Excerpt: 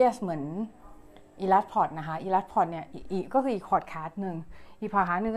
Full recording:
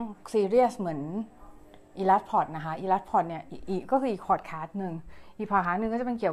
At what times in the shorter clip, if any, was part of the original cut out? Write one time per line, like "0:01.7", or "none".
none

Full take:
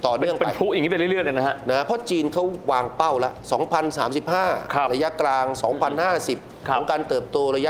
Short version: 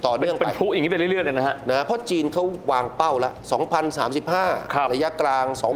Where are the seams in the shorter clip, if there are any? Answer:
none

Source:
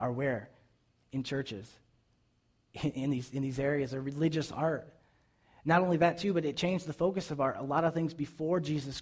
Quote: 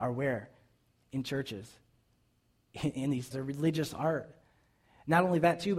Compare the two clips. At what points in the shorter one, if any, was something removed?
0:03.3

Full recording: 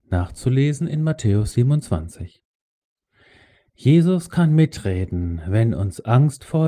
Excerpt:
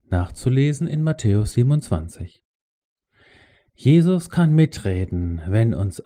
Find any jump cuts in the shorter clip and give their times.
none

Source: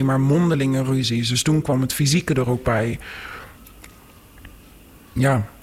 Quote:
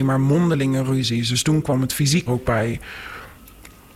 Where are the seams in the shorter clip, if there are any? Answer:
0:02.3

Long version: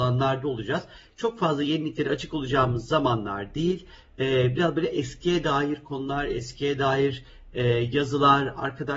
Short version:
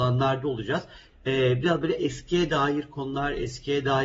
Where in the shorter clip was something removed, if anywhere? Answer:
0:01.1

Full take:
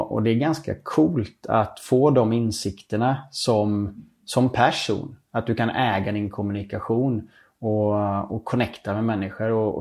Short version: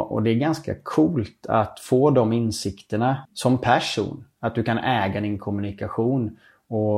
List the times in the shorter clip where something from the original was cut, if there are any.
0:03.3

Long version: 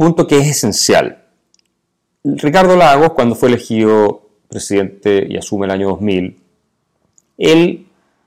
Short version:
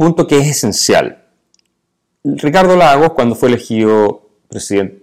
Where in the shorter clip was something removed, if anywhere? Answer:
none

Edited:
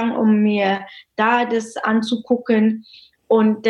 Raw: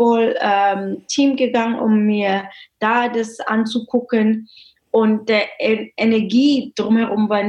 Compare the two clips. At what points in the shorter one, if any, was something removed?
none

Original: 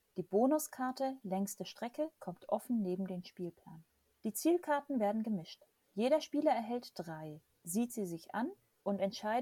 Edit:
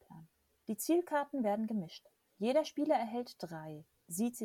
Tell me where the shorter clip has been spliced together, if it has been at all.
none

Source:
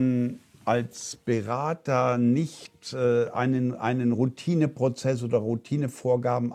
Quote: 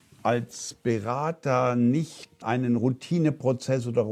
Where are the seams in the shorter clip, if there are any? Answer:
0:02.4

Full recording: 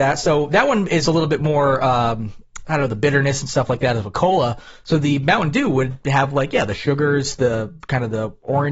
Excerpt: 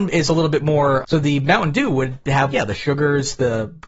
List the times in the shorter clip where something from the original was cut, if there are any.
0:01.0
0:02.5

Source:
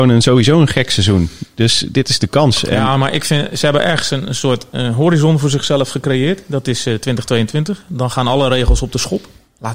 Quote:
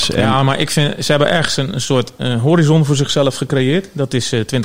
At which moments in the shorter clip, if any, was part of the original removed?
none

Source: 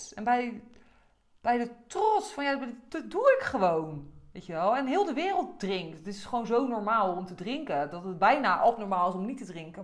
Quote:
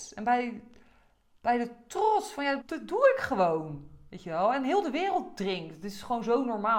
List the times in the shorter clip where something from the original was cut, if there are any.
0:02.6

